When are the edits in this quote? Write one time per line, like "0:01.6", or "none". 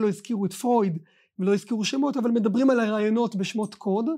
none

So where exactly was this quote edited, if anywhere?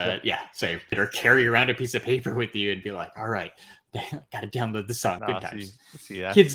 0:00.9
0:05.2

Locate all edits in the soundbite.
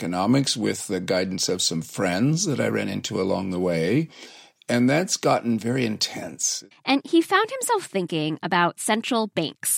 0:06.7

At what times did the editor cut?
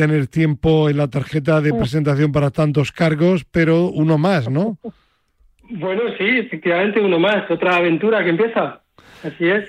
none

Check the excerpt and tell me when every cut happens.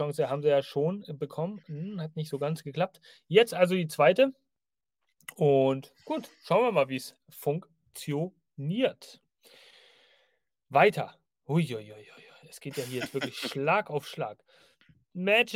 none

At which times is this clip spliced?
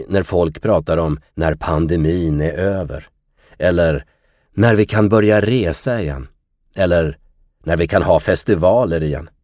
0:01.3

